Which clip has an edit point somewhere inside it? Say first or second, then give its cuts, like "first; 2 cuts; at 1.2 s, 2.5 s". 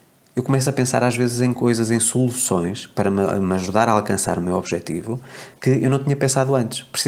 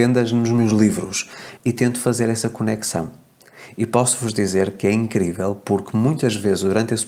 second; 1 cut; at 1.6 s